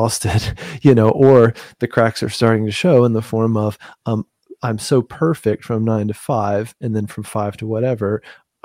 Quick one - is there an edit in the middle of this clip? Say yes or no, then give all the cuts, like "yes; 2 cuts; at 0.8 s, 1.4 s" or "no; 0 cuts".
no; 0 cuts